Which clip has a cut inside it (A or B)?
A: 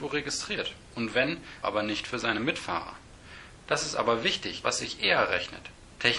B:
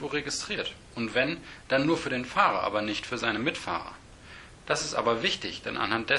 A